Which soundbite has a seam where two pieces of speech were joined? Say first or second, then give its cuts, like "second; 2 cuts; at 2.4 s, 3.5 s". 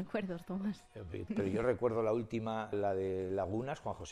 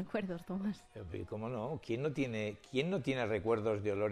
first; 2 cuts; at 1.3 s, 2.7 s